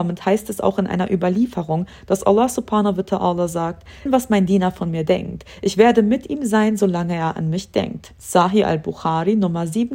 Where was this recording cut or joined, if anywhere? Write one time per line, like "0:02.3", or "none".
0:04.1